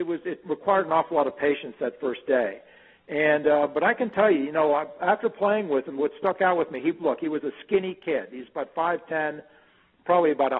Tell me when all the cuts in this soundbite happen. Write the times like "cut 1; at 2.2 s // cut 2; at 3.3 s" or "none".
none